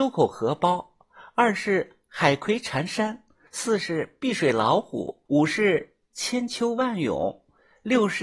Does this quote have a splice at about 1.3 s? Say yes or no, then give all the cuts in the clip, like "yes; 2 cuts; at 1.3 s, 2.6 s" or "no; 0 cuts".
no; 2 cuts; at 3.5 s, 5.3 s